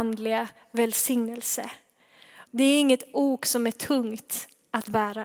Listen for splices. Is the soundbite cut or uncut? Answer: cut